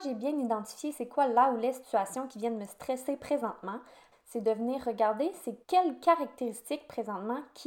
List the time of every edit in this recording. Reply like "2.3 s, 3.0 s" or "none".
4.1 s, 5.6 s